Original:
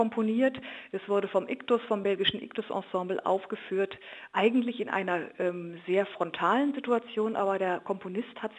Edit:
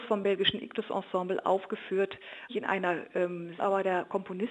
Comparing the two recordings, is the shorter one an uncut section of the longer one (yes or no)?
no